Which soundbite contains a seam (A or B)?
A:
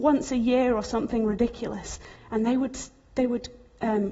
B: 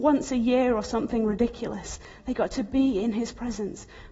A